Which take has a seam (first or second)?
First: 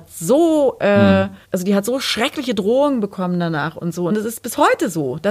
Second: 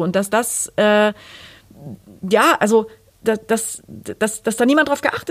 first